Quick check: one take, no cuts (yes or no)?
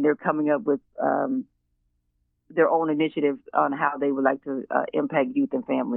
yes